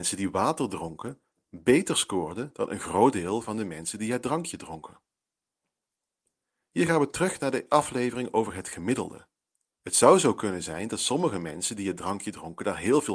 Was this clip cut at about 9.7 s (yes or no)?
yes